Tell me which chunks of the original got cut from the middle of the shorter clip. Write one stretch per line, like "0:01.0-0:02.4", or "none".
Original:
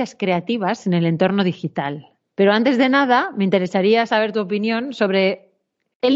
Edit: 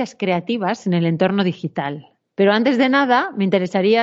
none